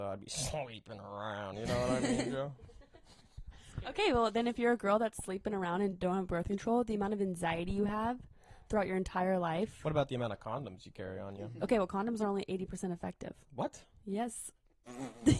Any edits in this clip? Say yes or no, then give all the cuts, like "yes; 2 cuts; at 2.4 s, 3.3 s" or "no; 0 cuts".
no; 0 cuts